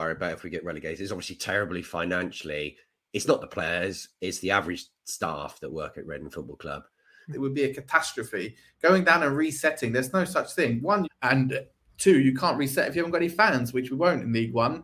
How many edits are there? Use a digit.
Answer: 2